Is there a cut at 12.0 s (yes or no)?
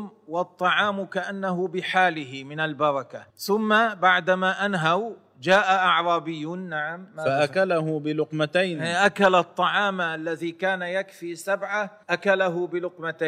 yes